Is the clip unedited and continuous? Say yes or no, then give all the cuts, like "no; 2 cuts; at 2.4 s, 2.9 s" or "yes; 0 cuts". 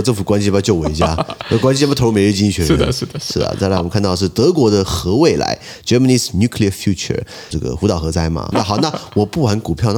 no; 2 cuts; at 7.5 s, 8.5 s